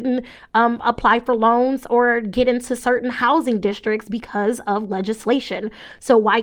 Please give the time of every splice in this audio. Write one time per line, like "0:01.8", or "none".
none